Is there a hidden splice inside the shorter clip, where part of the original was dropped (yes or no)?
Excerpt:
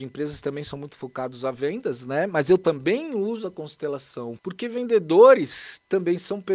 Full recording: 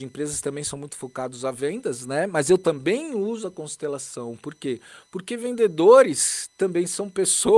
yes